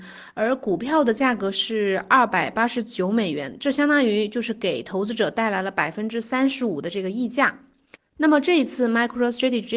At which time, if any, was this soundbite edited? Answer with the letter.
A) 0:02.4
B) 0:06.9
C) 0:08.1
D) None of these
D